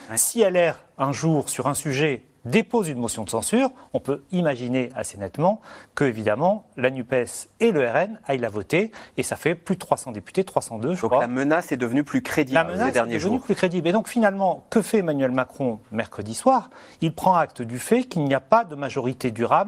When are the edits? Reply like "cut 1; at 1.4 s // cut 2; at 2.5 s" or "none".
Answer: none